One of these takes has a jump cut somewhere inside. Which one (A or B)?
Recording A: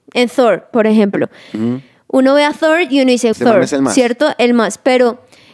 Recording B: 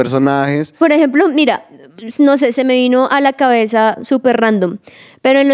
A